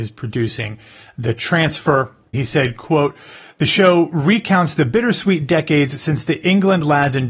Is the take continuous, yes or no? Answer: no